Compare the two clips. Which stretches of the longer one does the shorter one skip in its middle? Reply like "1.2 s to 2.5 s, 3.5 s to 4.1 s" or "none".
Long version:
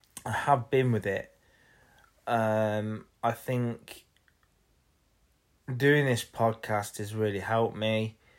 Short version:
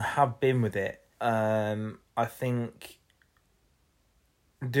1.4 s to 2.2 s